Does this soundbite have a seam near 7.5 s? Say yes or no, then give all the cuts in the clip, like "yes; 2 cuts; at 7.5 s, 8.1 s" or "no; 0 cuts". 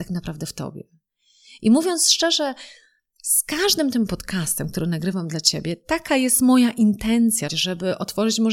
yes; 1 cut; at 7.5 s